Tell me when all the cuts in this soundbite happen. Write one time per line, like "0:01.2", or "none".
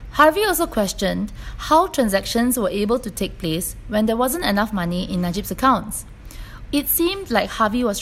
0:06.7